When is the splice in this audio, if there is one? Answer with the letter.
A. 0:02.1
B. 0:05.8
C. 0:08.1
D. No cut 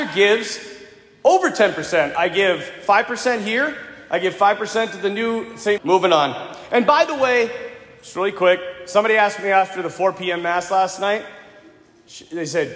B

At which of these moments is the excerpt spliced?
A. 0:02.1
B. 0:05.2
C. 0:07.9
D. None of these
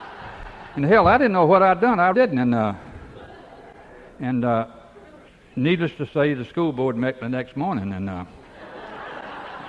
A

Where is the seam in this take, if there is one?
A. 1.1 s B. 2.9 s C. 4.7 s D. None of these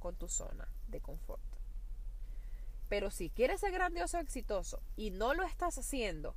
B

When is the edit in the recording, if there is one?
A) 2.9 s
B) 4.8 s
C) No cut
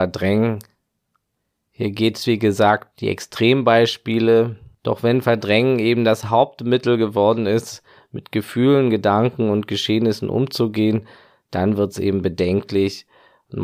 A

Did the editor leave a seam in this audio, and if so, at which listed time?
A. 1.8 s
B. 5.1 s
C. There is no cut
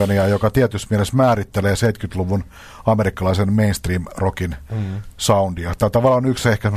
C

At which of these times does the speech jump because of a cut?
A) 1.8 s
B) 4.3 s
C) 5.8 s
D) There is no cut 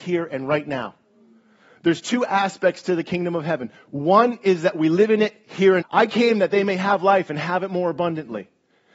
C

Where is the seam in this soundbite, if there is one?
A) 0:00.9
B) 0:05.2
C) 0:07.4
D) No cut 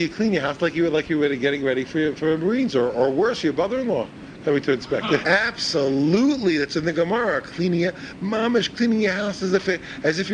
B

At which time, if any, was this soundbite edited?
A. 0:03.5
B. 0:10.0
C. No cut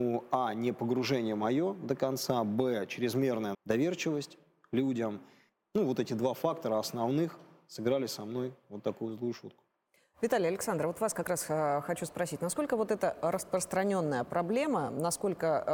A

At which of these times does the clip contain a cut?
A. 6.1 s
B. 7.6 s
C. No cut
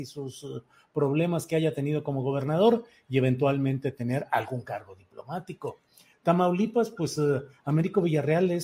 A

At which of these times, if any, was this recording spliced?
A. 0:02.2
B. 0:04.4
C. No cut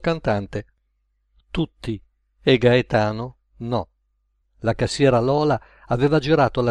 B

